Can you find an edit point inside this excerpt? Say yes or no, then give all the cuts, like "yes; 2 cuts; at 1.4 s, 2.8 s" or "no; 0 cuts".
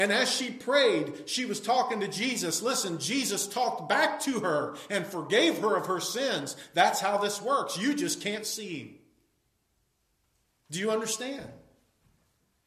no; 0 cuts